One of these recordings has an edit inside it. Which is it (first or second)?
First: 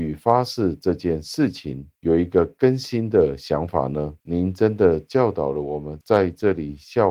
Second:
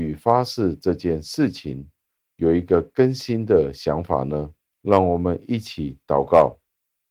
first